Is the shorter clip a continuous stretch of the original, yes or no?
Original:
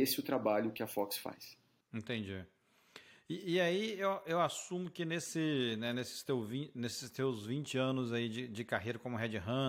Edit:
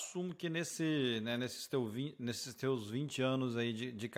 yes